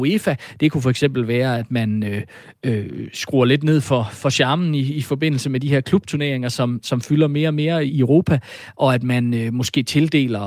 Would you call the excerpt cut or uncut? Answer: cut